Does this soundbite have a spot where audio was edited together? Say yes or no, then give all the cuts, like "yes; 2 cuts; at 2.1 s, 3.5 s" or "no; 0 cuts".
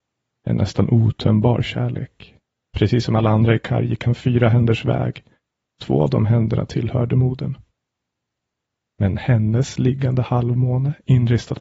yes; 1 cut; at 2.7 s